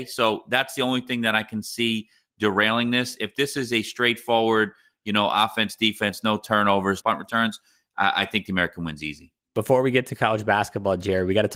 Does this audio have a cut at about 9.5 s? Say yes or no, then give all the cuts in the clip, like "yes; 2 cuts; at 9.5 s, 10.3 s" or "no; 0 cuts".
no; 1 cut; at 7.0 s